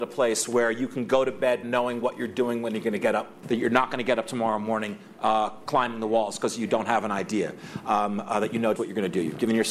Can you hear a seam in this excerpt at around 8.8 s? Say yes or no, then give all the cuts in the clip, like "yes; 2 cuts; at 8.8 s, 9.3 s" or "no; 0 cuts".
yes; 2 cuts; at 3.4 s, 8.8 s